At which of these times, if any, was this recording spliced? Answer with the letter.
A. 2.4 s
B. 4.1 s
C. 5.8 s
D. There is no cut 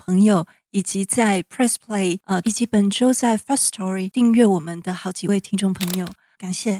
A